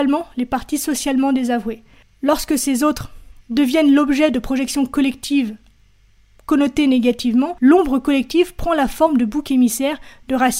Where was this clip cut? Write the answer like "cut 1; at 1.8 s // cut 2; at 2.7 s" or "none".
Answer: cut 1; at 3.4 s